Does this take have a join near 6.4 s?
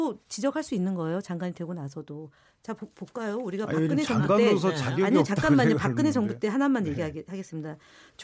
no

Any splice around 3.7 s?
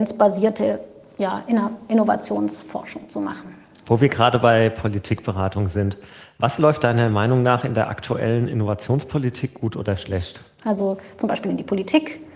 no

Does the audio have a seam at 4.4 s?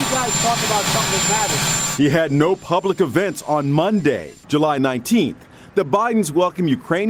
yes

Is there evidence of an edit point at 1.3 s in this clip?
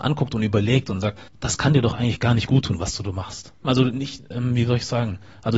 yes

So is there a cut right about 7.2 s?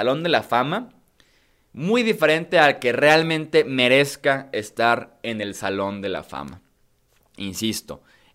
no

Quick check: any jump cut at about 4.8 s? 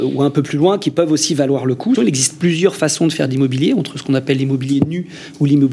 no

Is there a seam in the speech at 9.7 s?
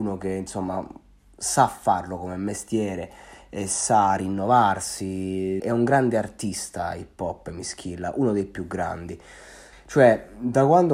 yes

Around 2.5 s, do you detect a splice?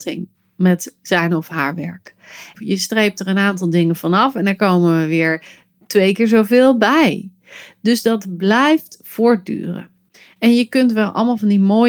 yes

